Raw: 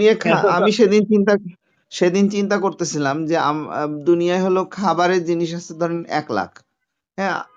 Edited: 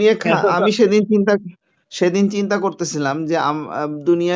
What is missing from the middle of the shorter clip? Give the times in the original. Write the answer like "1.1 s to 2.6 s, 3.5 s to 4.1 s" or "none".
none